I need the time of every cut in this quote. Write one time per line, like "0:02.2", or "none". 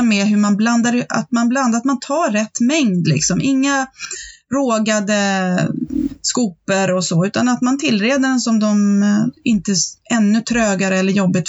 0:09.4

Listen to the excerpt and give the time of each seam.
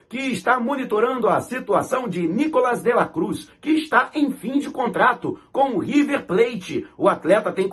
0:03.5

